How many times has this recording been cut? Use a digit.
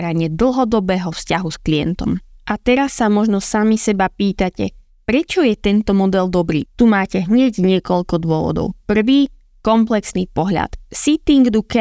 1